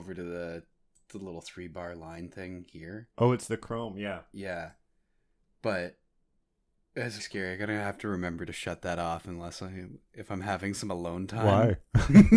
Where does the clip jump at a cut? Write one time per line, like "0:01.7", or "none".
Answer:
0:07.2